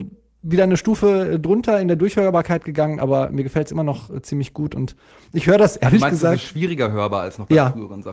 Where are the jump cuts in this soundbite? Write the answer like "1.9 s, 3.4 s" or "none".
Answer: none

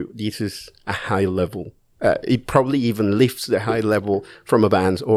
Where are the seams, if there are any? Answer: none

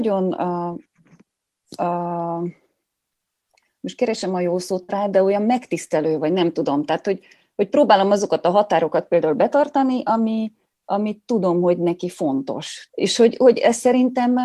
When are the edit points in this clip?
12.9 s

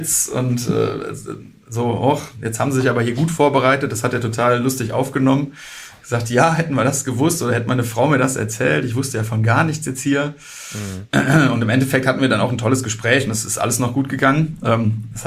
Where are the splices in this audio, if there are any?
none

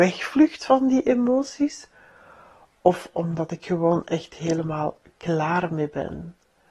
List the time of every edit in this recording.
3.6 s

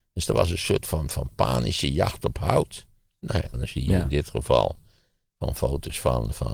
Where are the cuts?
3.5 s

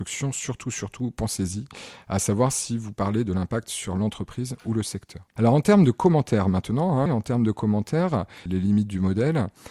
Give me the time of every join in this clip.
7.1 s, 8.5 s

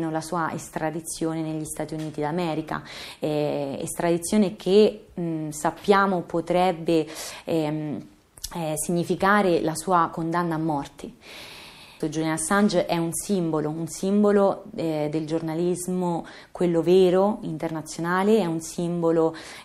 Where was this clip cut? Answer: 12.0 s

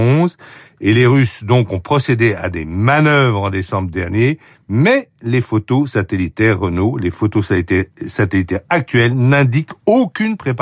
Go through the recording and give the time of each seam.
none

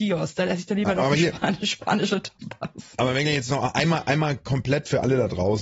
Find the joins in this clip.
none

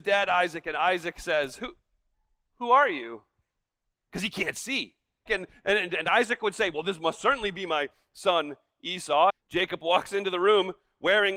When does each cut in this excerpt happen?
5.3 s, 9.3 s

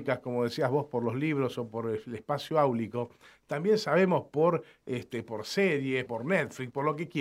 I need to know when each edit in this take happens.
6.1 s

